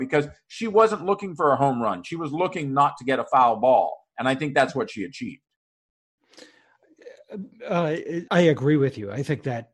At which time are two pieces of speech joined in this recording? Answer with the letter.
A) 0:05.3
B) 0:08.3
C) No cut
B